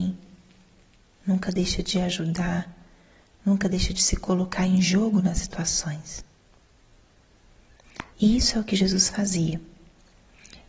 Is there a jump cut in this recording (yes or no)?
no